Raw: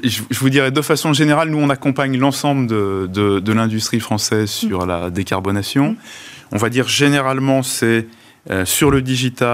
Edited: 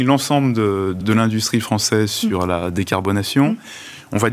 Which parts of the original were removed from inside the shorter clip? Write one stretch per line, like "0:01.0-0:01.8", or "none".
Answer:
0:03.1-0:03.4